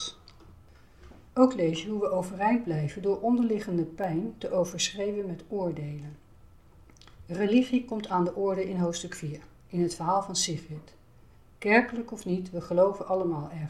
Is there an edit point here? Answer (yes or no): no